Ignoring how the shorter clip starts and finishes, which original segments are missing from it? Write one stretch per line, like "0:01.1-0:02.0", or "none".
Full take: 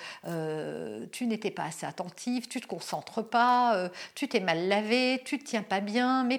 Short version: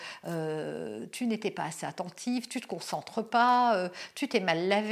none

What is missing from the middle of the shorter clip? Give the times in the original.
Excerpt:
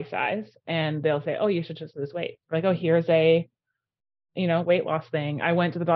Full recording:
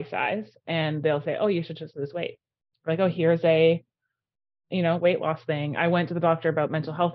0:02.4-0:02.8

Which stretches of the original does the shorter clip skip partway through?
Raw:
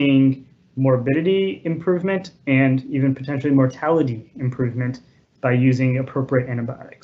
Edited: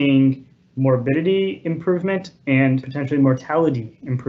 0:02.8-0:03.2

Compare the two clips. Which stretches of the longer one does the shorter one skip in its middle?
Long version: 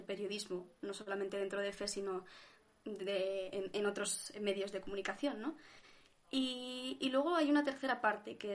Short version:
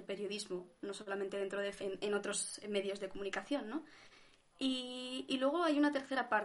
0:01.8-0:03.5

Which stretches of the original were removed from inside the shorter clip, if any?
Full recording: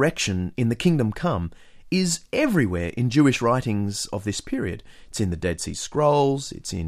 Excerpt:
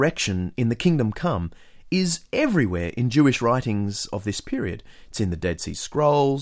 none

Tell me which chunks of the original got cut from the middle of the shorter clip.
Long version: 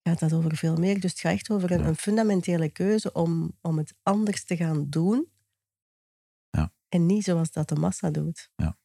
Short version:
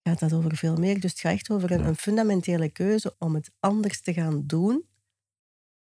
0:03.1-0:03.6

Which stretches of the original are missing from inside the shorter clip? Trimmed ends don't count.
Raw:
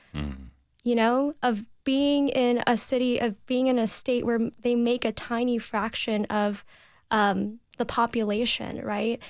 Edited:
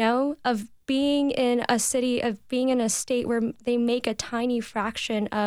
none

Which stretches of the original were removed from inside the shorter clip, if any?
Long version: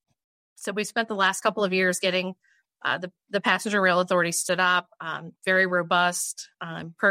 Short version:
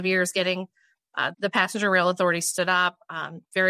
0:03.0-0:03.2

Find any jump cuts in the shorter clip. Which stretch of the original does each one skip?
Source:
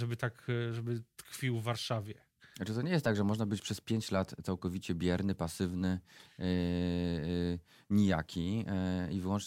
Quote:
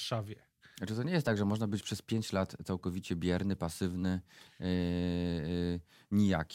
none

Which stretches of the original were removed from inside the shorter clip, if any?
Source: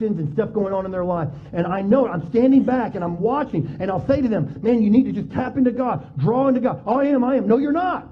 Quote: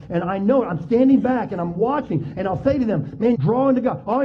0:04.8-0:06.1

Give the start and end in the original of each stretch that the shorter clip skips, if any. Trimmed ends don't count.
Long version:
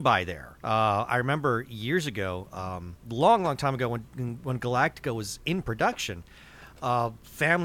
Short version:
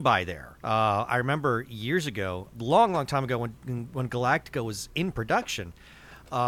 0:02.5-0:03.0

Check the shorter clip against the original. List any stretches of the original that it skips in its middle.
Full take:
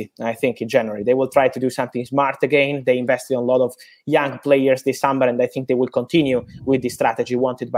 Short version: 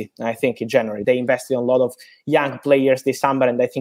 0:01.0-0:02.8

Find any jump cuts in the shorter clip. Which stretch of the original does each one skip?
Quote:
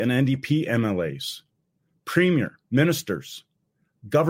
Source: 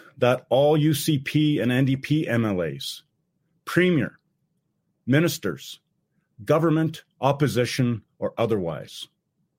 0:04.2-0:05.0

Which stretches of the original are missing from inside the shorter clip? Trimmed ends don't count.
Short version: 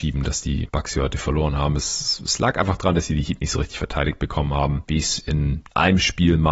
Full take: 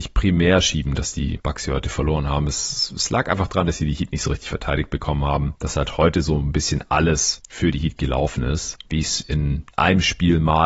0:05.6-0:08.9

